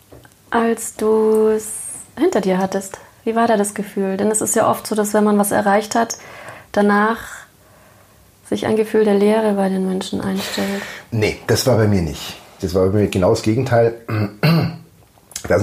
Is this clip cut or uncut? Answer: cut